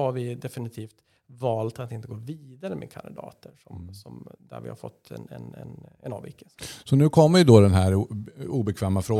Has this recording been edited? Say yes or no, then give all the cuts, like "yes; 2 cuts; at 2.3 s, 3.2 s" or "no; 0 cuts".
no; 0 cuts